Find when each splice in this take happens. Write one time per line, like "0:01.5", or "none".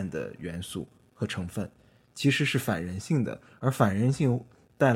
none